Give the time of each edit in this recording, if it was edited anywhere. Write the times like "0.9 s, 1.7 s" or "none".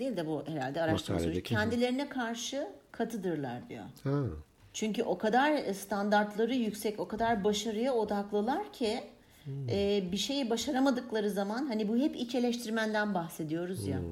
none